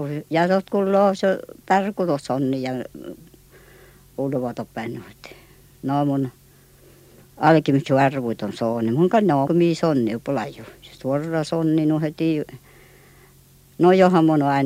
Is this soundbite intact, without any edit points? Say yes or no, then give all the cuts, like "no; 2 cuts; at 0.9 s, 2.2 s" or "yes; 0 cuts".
no; 1 cut; at 9.5 s